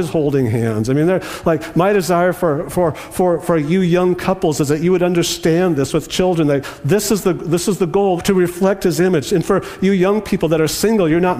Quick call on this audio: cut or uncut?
cut